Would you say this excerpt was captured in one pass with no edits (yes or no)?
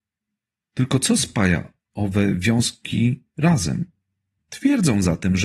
no